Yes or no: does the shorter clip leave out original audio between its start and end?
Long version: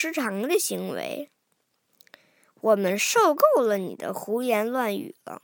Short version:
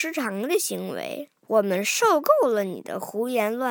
yes